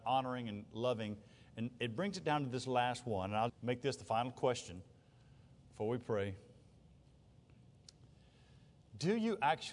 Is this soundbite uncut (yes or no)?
no